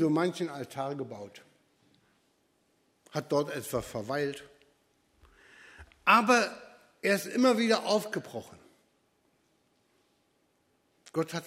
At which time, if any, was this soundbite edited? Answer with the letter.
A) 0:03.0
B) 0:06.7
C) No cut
C